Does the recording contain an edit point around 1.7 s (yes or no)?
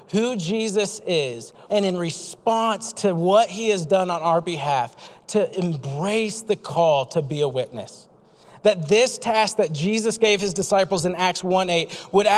yes